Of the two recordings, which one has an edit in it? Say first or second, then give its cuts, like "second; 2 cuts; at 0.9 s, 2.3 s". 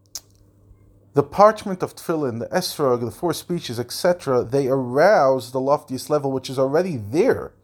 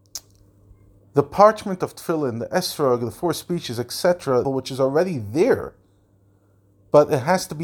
second; 1 cut; at 4.4 s